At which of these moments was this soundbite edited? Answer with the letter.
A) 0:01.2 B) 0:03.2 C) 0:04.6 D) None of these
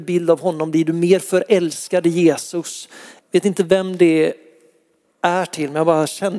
B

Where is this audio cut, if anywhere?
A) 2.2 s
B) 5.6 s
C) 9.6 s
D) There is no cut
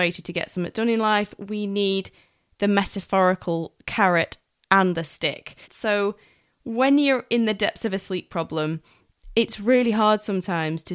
B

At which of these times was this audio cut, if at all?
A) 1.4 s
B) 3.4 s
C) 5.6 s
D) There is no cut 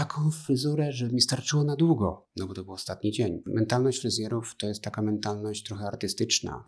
B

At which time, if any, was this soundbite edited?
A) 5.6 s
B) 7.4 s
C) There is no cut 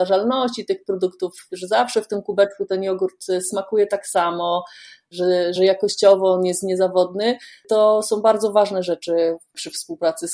A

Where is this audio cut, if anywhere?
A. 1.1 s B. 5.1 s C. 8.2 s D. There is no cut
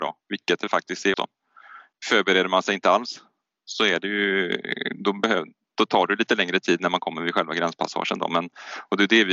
A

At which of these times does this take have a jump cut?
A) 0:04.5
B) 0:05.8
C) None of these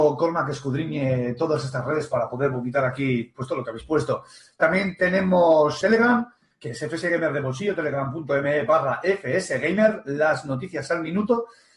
B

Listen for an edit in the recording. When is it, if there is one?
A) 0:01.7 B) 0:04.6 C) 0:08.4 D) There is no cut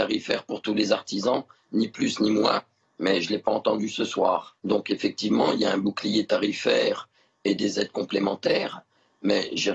B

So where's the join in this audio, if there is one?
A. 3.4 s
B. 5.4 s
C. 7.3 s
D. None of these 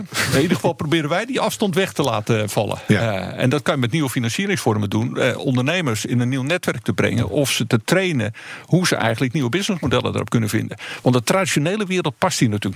B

